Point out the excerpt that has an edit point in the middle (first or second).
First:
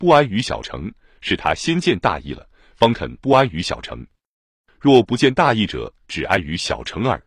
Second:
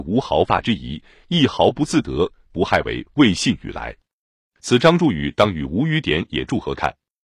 second